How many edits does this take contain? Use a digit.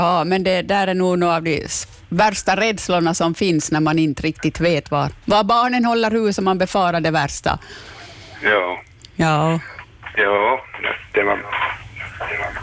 0